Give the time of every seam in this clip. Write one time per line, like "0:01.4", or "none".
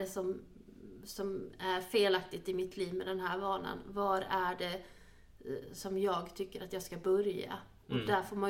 none